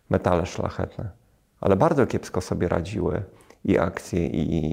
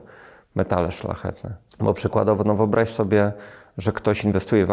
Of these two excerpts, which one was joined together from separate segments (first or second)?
second